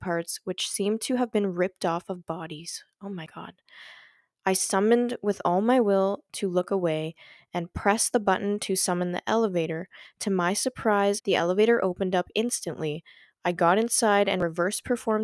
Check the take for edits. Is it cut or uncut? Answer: cut